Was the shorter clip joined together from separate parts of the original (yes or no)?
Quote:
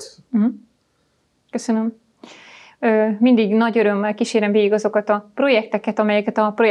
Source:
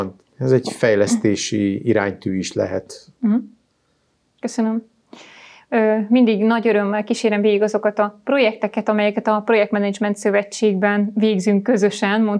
no